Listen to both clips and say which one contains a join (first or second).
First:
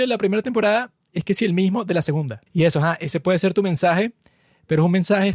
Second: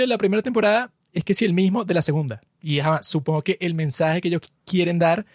first